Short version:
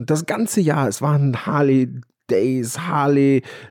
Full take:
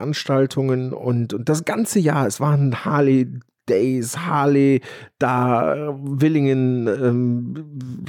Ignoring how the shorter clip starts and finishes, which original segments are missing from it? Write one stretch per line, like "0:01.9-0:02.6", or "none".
none